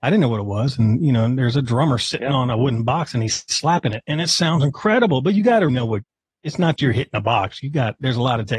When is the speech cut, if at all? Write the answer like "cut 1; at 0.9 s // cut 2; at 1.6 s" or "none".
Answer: cut 1; at 5.7 s // cut 2; at 6.8 s